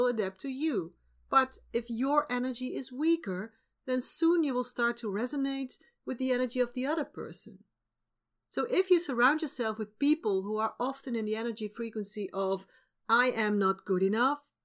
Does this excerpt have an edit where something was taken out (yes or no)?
no